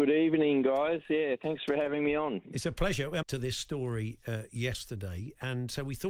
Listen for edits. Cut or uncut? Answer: cut